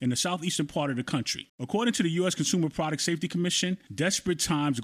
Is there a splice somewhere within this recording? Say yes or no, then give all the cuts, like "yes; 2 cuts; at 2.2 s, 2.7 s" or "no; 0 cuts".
yes; 1 cut; at 1.5 s